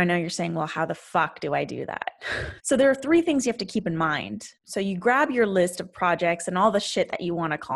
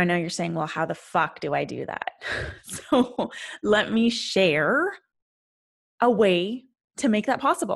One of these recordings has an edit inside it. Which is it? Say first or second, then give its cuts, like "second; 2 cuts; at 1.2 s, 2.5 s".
first; 2 cuts; at 2.6 s, 4.6 s